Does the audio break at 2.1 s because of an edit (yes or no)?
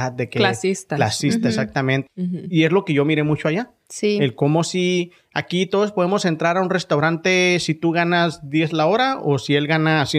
yes